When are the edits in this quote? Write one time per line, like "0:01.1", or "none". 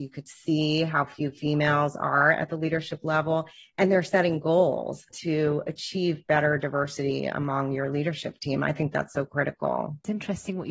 0:05.1